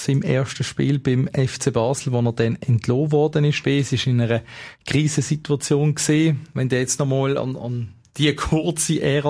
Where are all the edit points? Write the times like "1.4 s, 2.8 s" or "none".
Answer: 3.6 s